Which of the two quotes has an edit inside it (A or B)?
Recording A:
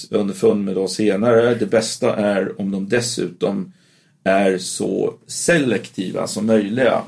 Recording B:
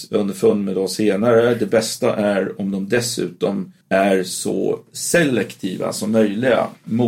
B